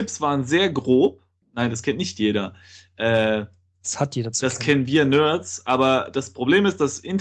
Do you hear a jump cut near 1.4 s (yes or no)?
yes